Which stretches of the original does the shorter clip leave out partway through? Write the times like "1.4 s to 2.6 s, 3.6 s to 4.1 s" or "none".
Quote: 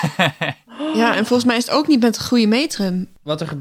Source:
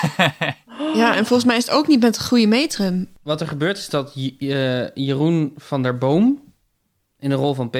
none